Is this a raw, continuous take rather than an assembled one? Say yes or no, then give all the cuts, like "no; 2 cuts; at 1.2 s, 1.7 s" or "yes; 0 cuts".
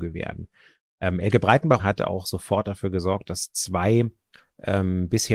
no; 1 cut; at 1.8 s